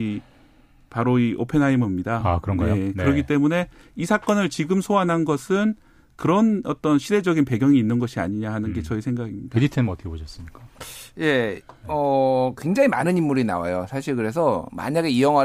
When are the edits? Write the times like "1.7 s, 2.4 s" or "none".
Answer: none